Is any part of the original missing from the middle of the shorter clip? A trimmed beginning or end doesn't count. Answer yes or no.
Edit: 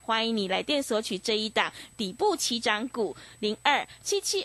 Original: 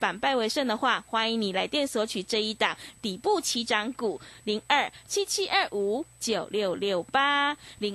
no